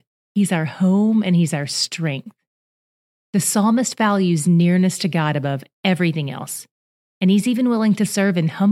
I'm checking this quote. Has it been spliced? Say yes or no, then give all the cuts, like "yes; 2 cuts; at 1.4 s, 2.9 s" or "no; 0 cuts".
no; 0 cuts